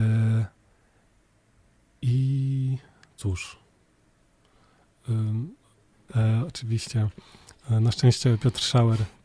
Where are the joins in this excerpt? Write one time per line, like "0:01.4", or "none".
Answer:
0:06.1